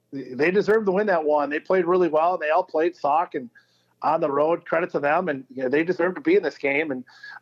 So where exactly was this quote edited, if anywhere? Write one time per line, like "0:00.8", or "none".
none